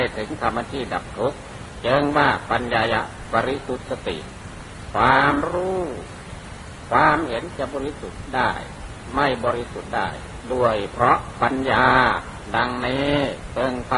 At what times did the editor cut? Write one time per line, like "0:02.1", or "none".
none